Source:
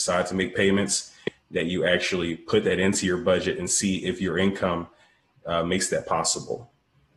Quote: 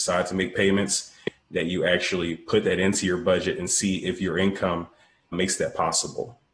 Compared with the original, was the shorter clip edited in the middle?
yes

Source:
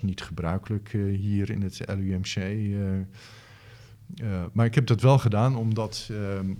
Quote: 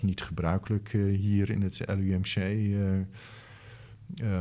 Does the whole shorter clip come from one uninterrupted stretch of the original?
yes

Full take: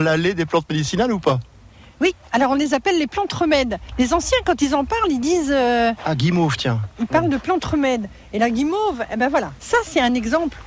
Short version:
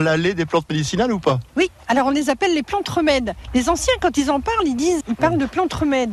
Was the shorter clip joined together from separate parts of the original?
yes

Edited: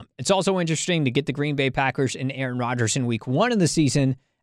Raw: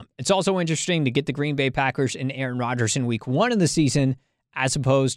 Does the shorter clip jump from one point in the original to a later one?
no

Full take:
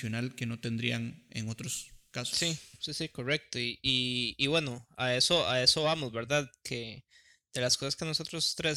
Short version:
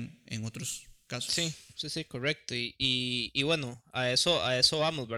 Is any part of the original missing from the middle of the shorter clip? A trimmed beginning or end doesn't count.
no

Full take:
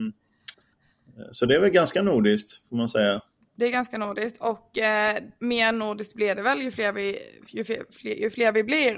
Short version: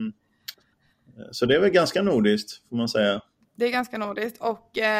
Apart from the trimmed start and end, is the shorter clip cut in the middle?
no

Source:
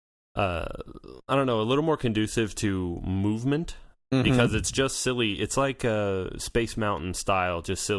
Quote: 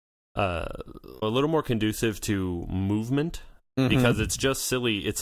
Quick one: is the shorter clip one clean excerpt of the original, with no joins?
no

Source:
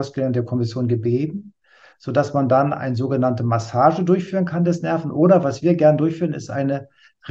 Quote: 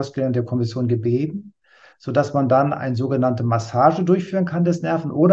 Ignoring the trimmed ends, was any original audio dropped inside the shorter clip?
no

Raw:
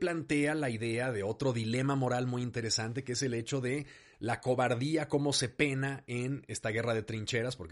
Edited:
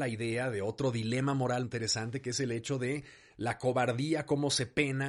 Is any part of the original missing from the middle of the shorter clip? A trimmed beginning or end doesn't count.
yes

